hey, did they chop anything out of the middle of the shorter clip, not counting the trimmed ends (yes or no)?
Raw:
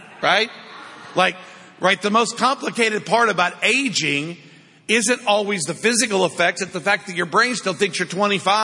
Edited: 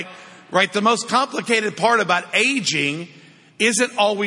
no